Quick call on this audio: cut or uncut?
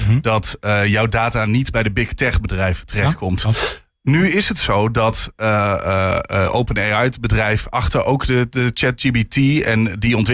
uncut